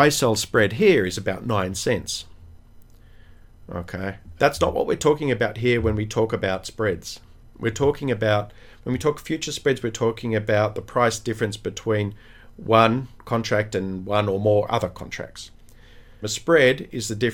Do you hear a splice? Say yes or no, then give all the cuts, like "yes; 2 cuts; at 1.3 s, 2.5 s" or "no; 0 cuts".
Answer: yes; 2 cuts; at 4.4 s, 16.2 s